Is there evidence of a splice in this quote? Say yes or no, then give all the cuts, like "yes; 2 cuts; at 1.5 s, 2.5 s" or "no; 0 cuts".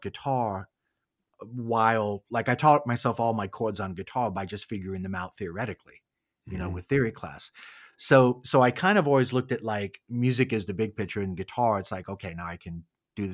no; 0 cuts